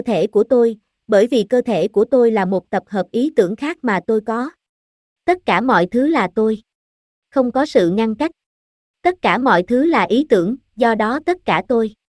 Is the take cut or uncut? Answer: uncut